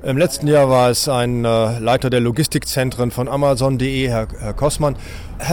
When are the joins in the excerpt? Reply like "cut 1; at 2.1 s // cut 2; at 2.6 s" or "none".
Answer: none